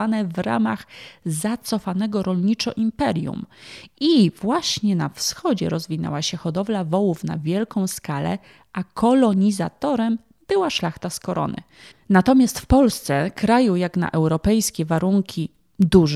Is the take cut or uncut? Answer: cut